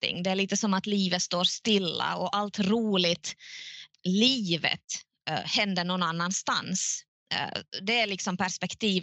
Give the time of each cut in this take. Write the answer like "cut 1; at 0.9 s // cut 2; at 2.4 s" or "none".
cut 1; at 3.9 s